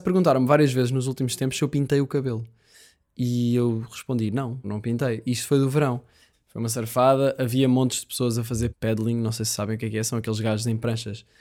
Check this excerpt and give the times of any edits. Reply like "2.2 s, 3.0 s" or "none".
4.6 s, 6.3 s, 8.7 s